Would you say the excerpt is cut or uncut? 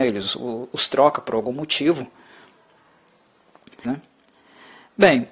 cut